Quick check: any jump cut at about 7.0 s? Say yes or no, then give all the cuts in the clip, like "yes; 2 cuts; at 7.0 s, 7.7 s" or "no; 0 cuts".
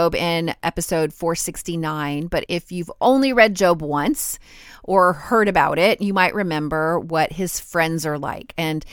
no; 1 cut; at 2.5 s